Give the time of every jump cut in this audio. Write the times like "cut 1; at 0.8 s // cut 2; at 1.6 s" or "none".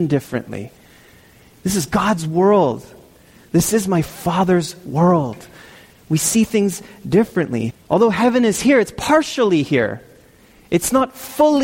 cut 1; at 7.7 s

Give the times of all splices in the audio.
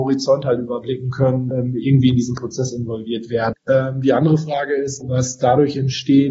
cut 1; at 1.5 s // cut 2; at 3.5 s // cut 3; at 5.0 s

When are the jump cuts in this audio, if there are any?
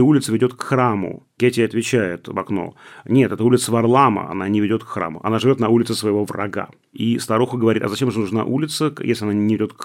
none

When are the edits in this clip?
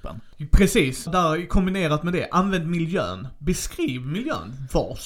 cut 1; at 1.1 s

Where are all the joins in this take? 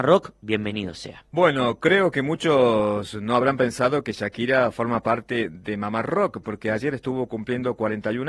cut 1; at 6.4 s

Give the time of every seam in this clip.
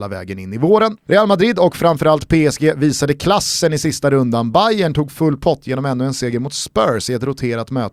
none

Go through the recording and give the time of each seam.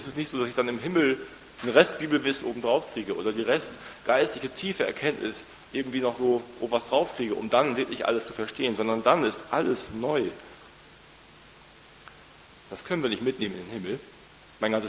cut 1; at 2.4 s // cut 2; at 12.6 s

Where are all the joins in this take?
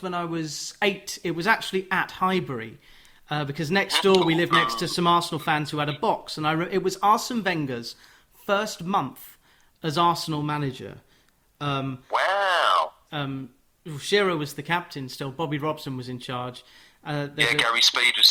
cut 1; at 13.1 s

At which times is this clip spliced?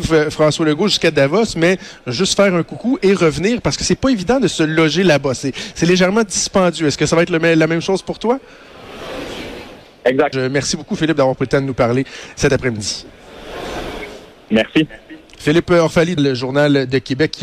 cut 1; at 10.3 s // cut 2; at 16.2 s

